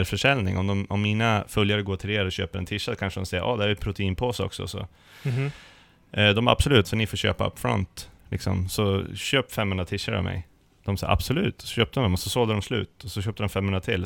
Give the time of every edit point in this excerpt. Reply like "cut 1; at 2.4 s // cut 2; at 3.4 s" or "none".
cut 1; at 6.8 s